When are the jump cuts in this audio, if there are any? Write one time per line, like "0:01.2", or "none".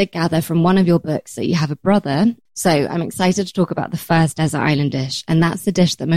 0:02.5